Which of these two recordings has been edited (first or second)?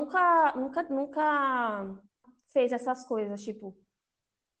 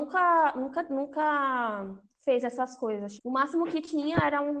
second